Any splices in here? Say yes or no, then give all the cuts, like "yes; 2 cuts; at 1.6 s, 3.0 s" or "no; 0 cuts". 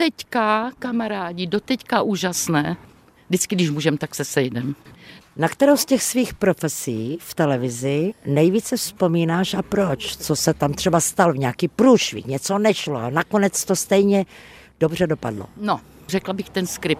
no; 0 cuts